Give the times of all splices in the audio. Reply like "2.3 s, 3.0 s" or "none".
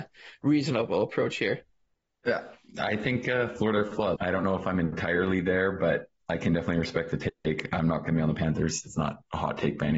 4.2 s, 8.8 s